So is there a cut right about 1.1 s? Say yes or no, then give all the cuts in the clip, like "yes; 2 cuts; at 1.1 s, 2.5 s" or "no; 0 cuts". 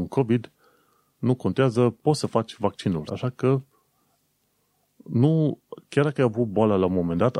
no; 1 cut; at 3.1 s